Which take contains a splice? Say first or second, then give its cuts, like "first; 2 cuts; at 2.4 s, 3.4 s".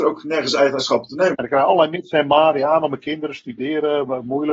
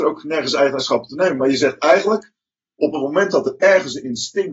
first; 1 cut; at 1.3 s